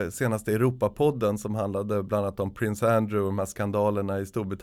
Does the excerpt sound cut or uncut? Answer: uncut